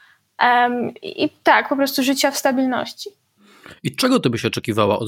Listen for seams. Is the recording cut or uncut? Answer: cut